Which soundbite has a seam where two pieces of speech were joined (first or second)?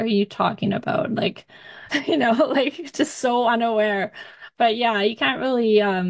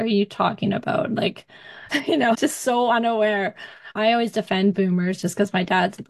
second